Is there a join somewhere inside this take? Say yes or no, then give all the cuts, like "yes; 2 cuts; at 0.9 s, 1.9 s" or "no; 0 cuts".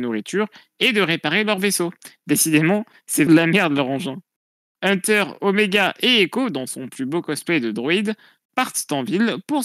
yes; 1 cut; at 3.3 s